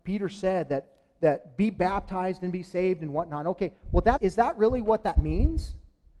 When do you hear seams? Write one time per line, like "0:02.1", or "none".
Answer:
0:04.2